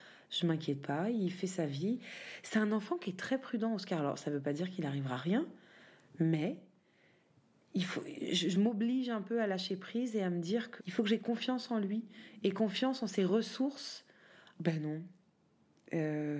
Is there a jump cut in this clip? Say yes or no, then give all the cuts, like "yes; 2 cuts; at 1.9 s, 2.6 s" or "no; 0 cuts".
yes; 2 cuts; at 10.8 s, 14.5 s